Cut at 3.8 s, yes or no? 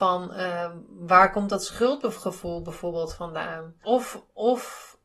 yes